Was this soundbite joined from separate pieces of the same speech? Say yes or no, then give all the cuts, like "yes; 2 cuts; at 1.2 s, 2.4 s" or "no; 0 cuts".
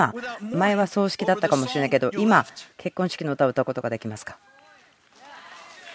no; 0 cuts